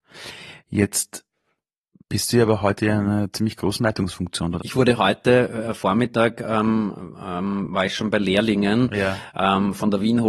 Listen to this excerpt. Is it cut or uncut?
cut